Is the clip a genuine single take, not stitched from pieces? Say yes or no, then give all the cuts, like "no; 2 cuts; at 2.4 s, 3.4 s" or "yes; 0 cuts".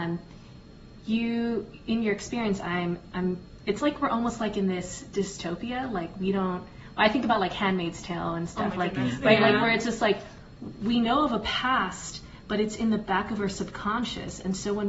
yes; 0 cuts